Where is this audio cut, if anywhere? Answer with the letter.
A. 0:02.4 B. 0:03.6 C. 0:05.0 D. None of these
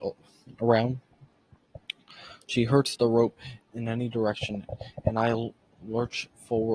B